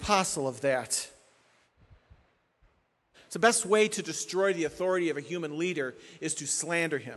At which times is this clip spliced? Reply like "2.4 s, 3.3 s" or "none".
3.1 s

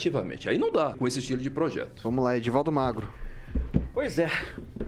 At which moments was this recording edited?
0.9 s

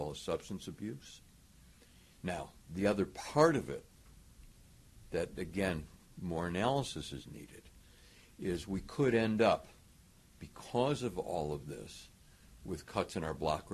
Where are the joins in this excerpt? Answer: 2.2 s

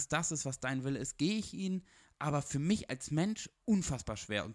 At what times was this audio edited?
none

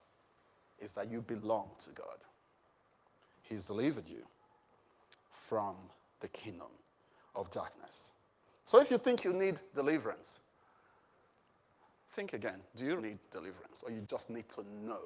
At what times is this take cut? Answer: 13.0 s

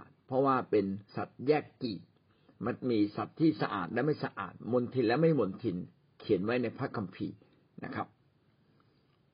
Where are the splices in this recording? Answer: none

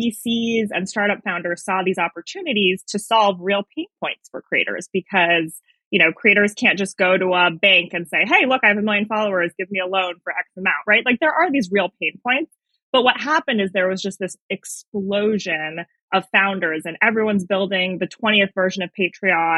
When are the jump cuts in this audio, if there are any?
none

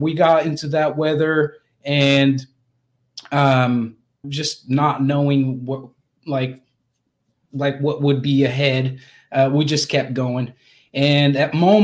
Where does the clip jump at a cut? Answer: 4.2 s

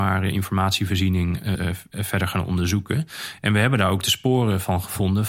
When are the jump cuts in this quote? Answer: 1.6 s

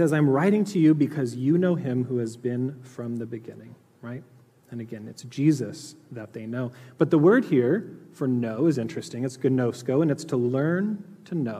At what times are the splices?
none

